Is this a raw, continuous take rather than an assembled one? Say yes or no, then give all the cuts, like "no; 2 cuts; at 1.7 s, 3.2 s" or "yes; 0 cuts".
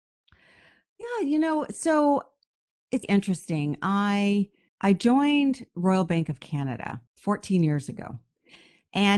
no; 3 cuts; at 3.0 s, 4.7 s, 7.1 s